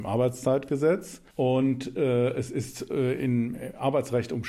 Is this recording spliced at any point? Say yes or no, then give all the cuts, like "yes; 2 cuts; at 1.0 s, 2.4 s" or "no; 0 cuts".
yes; 1 cut; at 1.3 s